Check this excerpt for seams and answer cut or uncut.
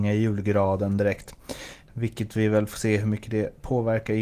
uncut